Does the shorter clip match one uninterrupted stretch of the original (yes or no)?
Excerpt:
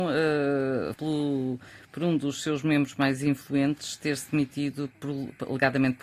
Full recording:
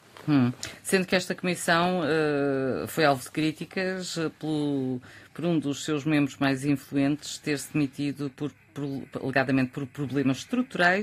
no